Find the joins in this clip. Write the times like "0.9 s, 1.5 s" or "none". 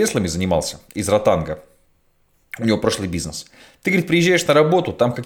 none